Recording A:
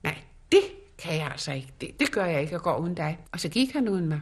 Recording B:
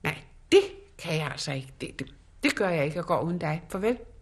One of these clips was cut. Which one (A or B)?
A